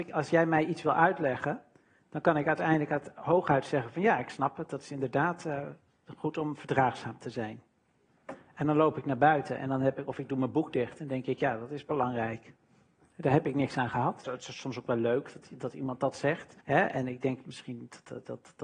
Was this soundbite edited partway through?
yes; 2 cuts; at 14.2 s, 16.6 s

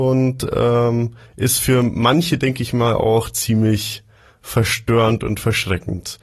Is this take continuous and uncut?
yes; 0 cuts

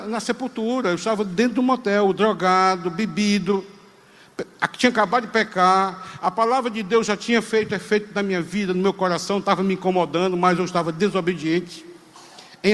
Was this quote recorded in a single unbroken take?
yes; 0 cuts

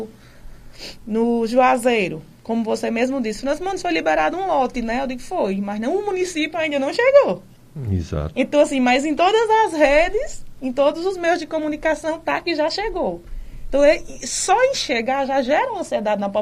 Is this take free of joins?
yes; 0 cuts

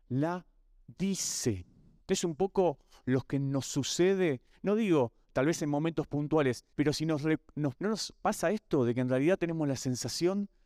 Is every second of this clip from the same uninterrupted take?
no; 3 cuts; at 2.0 s, 6.7 s, 7.8 s

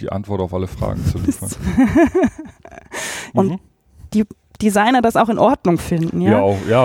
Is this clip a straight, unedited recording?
no; 1 cut; at 3.3 s

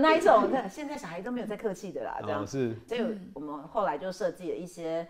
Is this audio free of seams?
no; 1 cut; at 2.9 s

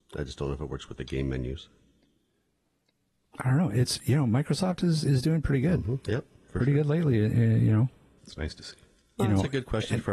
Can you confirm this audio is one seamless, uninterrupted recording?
no; 1 cut; at 8.2 s

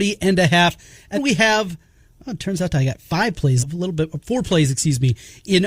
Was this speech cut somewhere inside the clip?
yes; 2 cuts; at 1.1 s, 3.6 s

